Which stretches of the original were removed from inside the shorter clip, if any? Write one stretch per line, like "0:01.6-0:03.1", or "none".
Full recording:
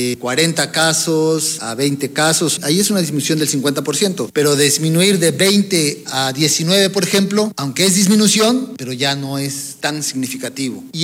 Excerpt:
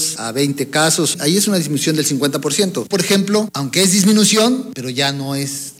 0:04.3-0:06.9

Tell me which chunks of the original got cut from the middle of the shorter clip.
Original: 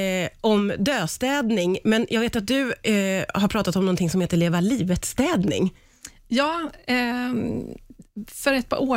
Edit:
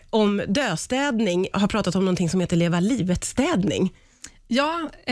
0:01.8-0:03.3

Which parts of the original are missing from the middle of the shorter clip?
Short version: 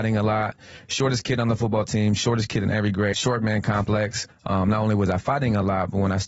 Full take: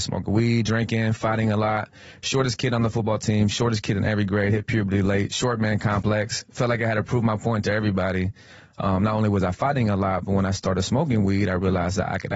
0:04.5-0:05.3
0:06.5-0:08.6

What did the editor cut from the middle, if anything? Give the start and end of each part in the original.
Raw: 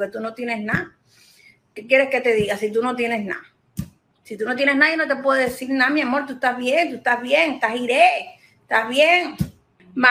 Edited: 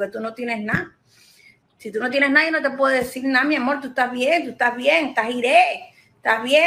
0:01.6-0:04.1

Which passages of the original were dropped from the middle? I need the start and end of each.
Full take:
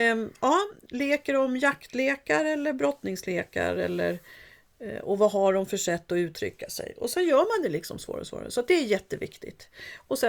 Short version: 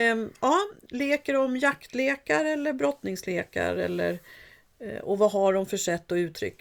none

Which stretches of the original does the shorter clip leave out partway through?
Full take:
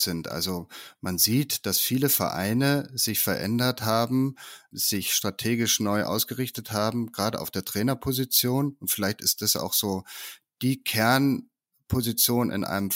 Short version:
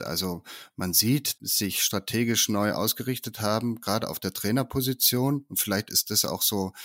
0:01.6-0:04.7

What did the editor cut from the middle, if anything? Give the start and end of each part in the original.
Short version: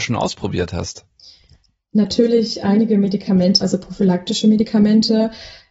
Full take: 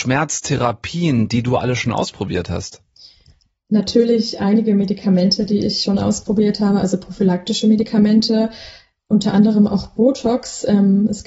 0:05.4-0:06.8

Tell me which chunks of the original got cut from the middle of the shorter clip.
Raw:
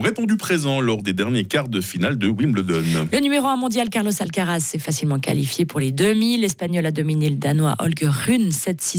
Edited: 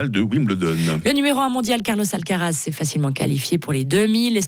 none

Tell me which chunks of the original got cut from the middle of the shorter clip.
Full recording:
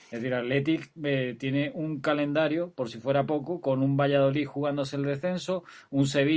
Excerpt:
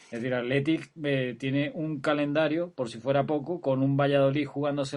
none

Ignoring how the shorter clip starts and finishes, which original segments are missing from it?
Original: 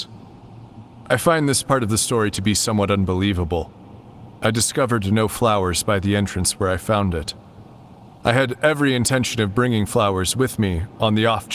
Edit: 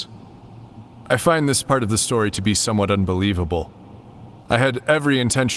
0:04.4-0:08.1

